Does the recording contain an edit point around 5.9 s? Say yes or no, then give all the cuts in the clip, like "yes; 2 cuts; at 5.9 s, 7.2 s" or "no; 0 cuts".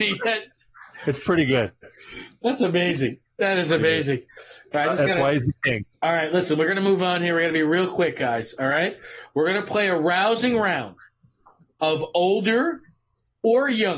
yes; 1 cut; at 5.9 s